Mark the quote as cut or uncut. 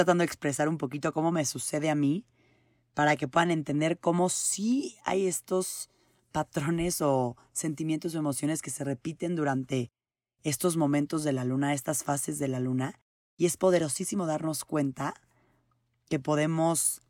uncut